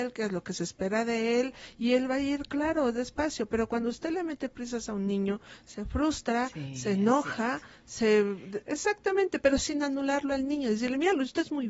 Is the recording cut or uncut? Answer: cut